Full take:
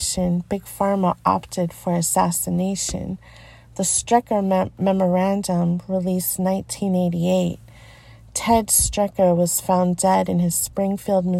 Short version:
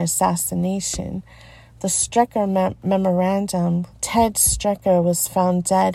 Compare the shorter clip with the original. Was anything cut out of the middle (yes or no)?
yes